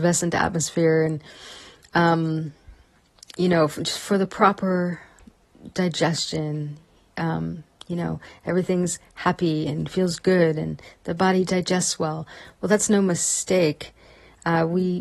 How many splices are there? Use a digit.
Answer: 0